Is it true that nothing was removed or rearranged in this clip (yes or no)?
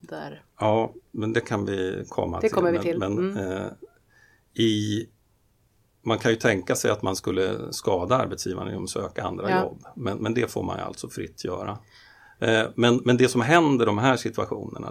yes